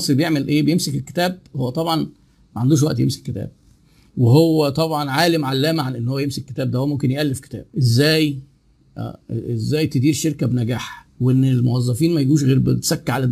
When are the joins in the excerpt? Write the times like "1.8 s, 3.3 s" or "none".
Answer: 7.7 s, 11.1 s

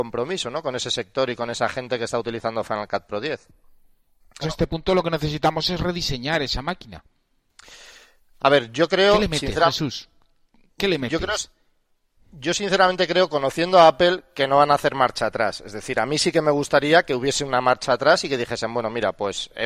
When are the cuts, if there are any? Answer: 4.4 s

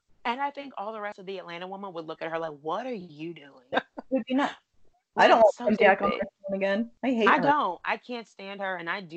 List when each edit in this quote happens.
3.7 s, 5.8 s

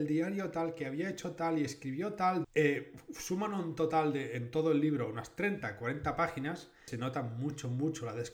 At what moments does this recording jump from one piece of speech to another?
2.4 s, 6.9 s

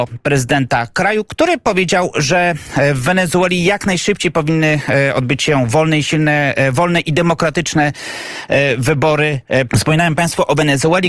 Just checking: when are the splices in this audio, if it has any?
9.7 s

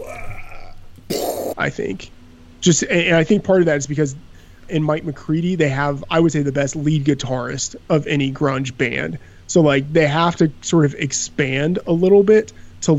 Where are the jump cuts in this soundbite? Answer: 1.5 s, 4.7 s

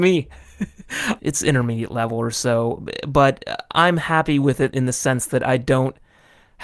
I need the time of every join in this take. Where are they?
1.2 s, 4.7 s

